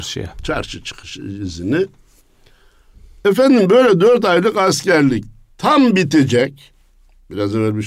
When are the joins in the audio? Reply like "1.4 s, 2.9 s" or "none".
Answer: 3.2 s